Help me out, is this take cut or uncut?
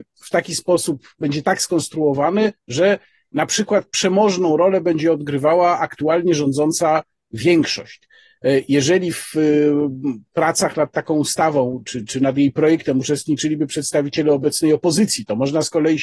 uncut